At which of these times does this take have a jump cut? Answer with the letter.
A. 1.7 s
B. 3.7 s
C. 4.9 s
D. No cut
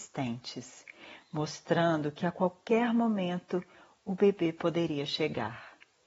D